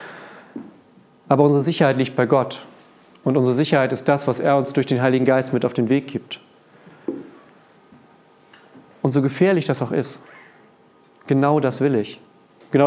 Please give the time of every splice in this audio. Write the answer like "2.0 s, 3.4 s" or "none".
none